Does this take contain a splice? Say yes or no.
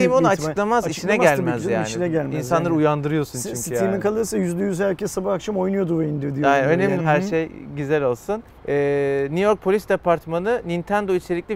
yes